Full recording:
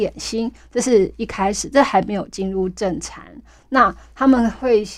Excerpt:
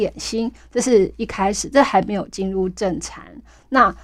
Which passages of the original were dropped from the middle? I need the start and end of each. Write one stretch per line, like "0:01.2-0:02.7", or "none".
none